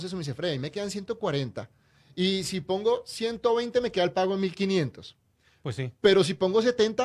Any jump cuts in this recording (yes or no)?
no